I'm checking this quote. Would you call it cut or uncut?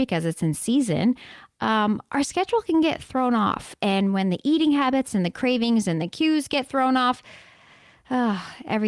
uncut